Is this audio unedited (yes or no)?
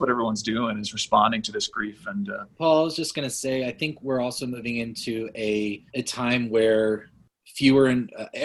no